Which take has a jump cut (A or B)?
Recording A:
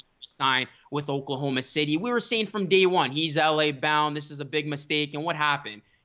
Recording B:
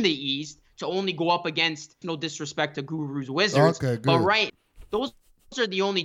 B